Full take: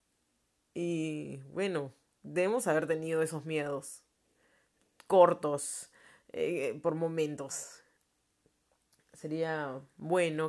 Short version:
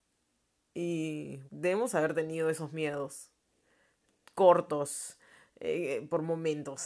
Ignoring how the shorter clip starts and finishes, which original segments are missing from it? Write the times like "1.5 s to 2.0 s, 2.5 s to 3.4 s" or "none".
1.5 s to 2.2 s